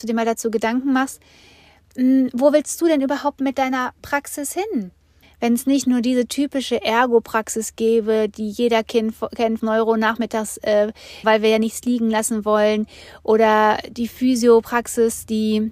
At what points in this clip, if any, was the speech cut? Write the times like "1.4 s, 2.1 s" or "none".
5.2 s, 9.6 s, 11.2 s